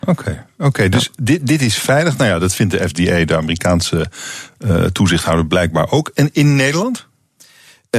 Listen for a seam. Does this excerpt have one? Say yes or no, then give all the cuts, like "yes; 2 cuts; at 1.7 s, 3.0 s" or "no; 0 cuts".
no; 0 cuts